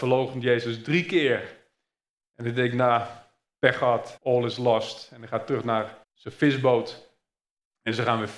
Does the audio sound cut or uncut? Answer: cut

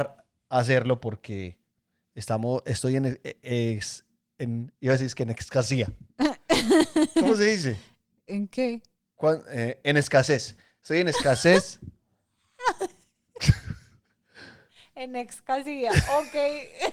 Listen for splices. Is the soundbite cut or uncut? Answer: uncut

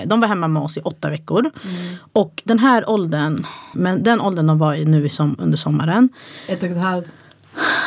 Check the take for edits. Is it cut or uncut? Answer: cut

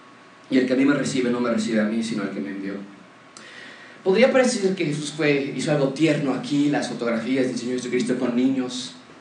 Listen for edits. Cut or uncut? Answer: uncut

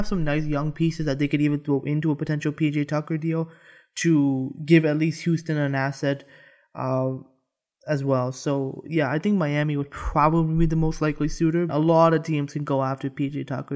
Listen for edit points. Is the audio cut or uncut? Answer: cut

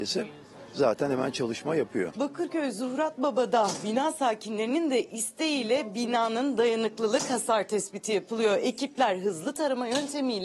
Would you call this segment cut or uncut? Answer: uncut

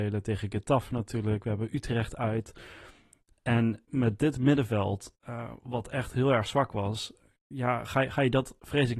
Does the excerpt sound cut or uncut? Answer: uncut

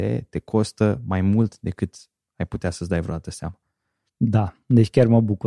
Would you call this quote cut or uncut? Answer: cut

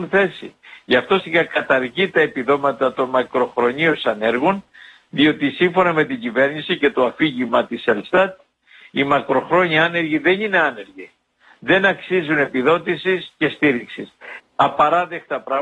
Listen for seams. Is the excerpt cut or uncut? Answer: cut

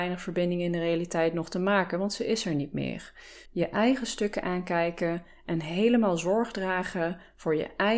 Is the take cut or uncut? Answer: cut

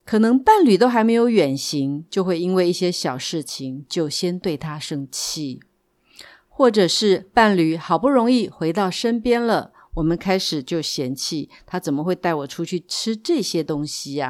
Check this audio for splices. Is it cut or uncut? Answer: uncut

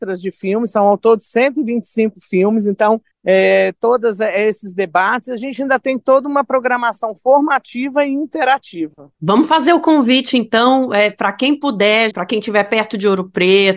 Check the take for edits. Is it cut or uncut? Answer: cut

